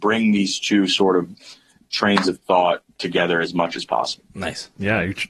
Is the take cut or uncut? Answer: uncut